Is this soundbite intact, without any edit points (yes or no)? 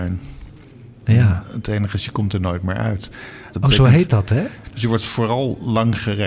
no